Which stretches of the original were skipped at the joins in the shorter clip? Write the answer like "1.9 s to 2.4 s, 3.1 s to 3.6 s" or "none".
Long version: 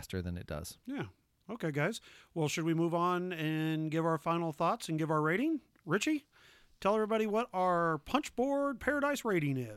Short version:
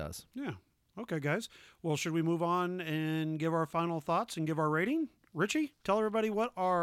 6.3 s to 6.8 s